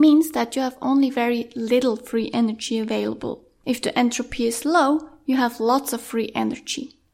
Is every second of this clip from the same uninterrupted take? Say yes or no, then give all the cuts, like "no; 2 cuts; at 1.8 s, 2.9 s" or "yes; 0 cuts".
yes; 0 cuts